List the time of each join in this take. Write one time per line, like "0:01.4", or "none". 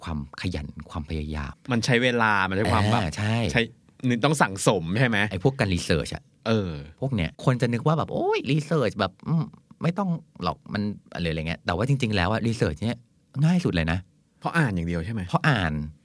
0:01.5
0:07.3